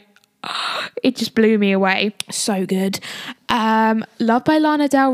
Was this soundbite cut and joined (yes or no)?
no